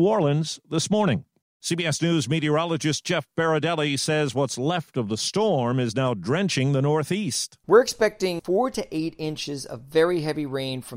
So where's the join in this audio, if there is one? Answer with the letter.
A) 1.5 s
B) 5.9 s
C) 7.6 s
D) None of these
D